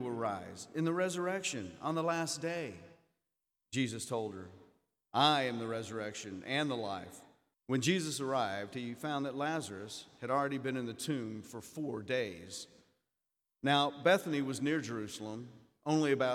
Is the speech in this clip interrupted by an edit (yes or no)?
yes